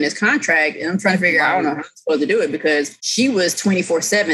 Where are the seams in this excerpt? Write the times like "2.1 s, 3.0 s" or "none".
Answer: 3.0 s